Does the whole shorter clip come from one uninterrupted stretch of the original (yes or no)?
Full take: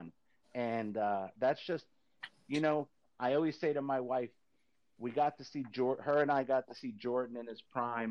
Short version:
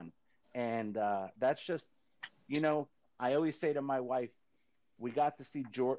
yes